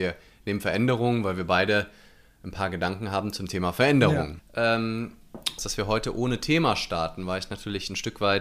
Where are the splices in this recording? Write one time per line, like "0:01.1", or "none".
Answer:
0:04.4
0:05.6